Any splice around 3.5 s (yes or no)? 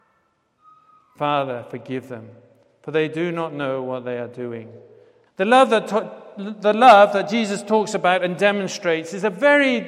no